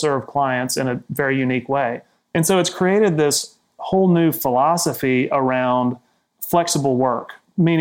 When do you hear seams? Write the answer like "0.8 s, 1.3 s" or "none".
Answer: none